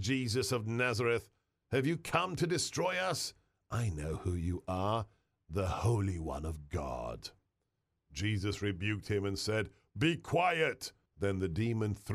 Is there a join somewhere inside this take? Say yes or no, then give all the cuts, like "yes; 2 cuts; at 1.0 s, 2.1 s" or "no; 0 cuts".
yes; 1 cut; at 11.1 s